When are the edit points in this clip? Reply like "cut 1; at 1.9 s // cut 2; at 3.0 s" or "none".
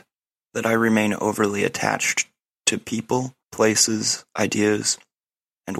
cut 1; at 3.4 s